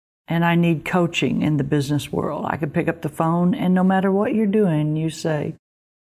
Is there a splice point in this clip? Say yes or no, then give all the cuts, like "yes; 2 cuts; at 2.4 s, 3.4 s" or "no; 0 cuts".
no; 0 cuts